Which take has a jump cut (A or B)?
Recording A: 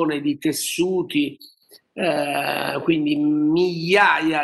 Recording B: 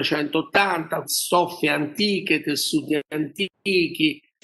B